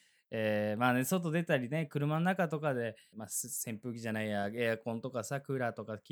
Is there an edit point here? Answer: yes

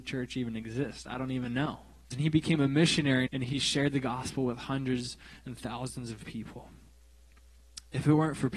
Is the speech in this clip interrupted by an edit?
yes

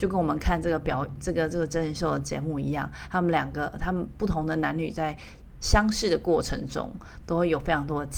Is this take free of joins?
yes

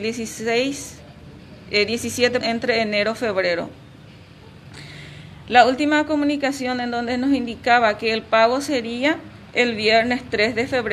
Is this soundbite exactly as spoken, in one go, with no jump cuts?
no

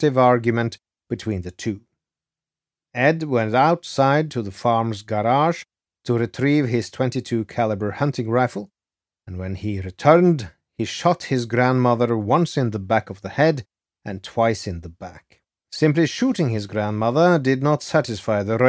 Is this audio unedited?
no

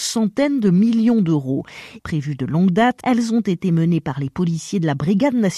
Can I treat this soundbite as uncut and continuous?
no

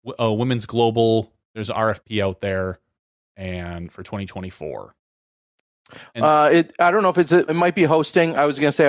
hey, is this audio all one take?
no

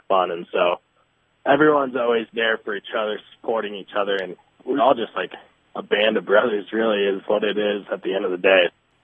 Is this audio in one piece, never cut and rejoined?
no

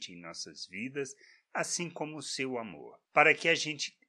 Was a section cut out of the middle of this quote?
no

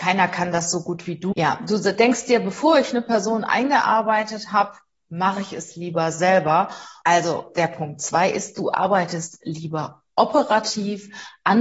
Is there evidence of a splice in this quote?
yes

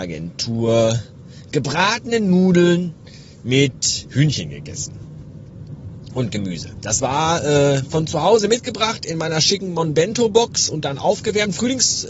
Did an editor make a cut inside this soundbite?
no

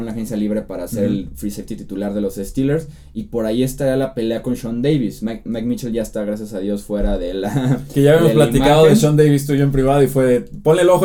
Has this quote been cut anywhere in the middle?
no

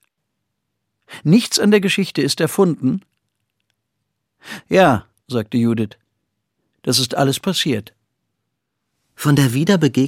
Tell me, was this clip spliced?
no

